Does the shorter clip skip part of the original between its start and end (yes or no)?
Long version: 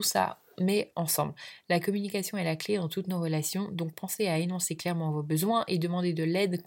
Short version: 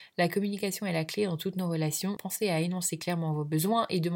yes